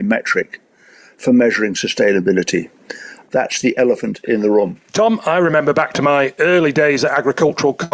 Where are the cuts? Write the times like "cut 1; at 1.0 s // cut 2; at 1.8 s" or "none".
cut 1; at 3.2 s // cut 2; at 4.9 s